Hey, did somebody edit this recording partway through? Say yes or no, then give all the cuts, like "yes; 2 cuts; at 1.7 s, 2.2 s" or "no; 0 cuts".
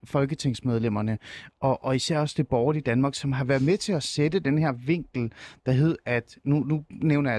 no; 0 cuts